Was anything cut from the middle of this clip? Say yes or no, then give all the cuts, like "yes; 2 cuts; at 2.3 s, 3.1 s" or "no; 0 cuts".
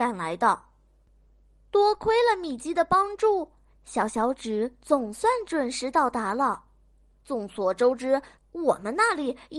yes; 2 cuts; at 7.1 s, 8.4 s